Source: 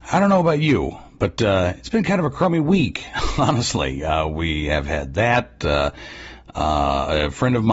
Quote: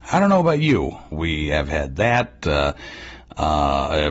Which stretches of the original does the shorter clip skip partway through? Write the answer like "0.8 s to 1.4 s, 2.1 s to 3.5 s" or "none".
1.1 s to 4.3 s